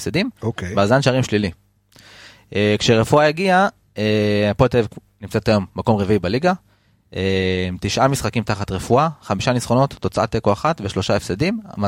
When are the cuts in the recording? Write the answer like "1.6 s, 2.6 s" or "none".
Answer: none